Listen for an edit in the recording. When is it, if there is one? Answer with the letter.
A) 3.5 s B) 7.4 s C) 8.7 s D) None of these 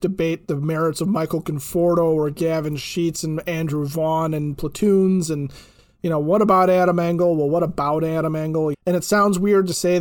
C